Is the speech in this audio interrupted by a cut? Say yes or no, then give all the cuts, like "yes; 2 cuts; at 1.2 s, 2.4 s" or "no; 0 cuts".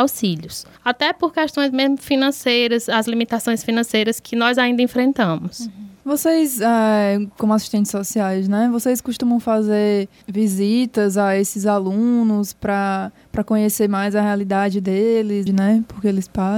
yes; 1 cut; at 15.5 s